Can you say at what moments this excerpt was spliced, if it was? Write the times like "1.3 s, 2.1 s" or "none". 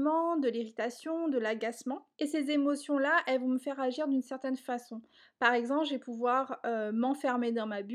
2.1 s